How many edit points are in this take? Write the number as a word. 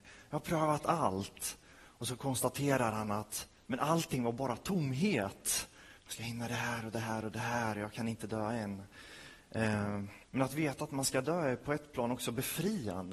two